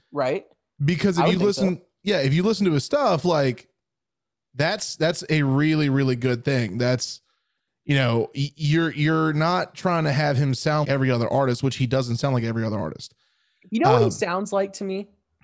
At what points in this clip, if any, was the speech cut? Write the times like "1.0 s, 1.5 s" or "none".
10.8 s